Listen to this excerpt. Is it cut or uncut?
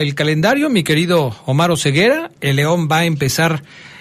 cut